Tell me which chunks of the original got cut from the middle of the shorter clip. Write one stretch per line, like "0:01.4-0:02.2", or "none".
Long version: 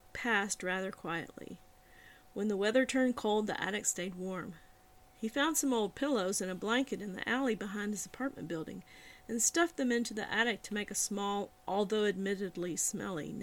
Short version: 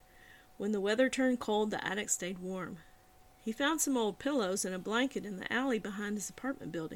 none